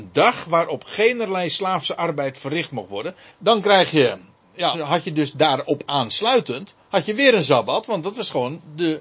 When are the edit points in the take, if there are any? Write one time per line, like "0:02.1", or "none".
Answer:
0:03.3
0:04.7